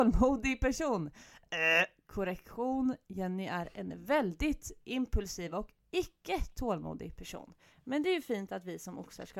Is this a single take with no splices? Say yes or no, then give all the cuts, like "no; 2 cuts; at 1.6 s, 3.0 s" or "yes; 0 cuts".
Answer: yes; 0 cuts